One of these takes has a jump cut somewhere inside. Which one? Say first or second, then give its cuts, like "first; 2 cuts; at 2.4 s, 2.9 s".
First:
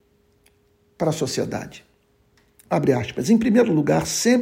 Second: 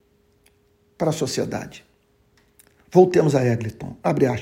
first; 1 cut; at 2.7 s